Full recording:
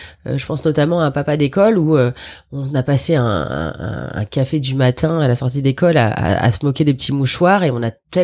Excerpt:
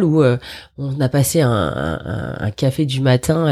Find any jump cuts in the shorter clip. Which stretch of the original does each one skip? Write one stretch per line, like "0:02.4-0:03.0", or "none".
none

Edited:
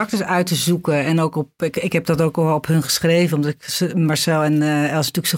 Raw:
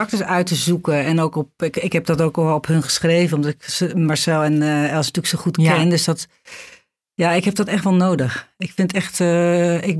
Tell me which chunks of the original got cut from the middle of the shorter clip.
none

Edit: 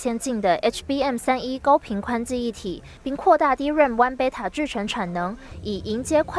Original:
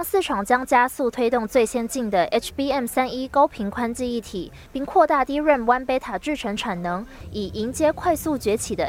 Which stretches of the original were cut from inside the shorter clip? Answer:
none

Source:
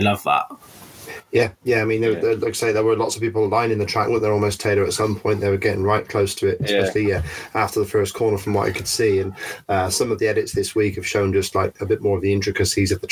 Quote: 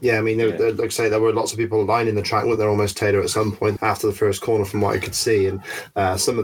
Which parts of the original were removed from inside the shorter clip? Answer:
0:05.4-0:07.5

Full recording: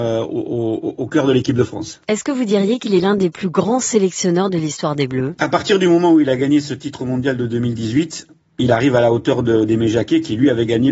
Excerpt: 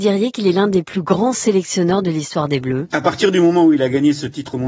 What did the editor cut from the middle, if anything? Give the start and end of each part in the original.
none

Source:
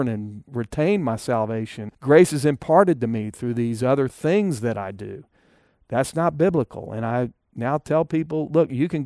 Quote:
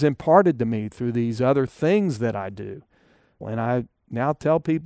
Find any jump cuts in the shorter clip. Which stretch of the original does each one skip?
0:05.8-0:06.9

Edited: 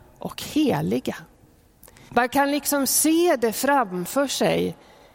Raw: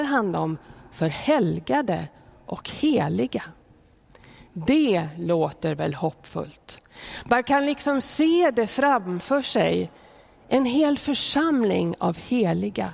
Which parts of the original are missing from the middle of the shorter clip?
0:04.4-0:07.2

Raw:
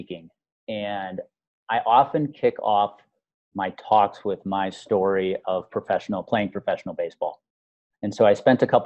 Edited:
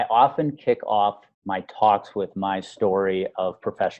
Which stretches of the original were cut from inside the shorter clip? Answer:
0:03.1-0:03.4

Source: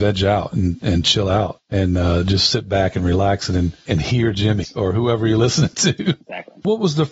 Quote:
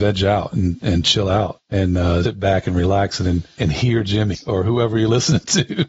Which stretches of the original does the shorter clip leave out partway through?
0:02.2-0:02.5

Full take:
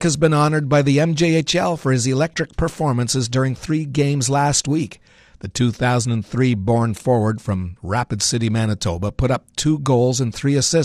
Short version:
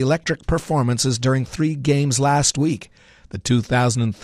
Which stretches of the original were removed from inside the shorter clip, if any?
none

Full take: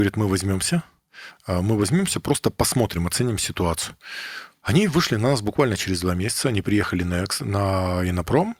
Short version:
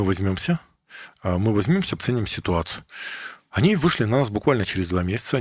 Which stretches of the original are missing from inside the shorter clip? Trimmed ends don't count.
0:02.2-0:03.1

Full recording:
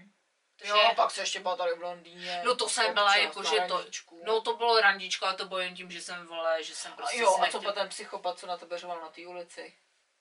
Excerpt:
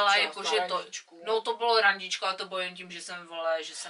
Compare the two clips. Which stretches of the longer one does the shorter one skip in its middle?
none

